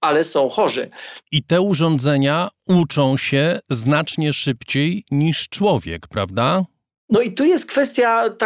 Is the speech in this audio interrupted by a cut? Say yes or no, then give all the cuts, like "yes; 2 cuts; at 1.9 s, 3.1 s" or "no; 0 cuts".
yes; 1 cut; at 1.2 s